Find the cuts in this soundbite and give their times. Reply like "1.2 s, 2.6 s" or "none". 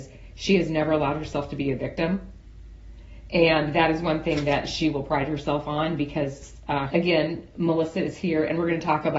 6.9 s